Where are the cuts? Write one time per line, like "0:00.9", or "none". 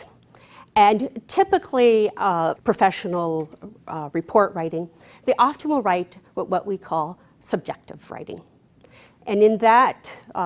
0:02.6